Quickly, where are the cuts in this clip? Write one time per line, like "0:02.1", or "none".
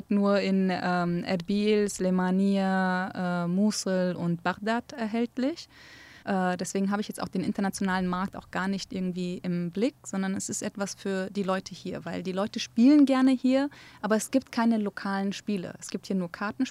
0:06.2